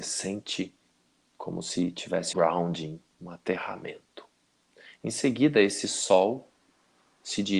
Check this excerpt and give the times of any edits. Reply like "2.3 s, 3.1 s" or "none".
2.3 s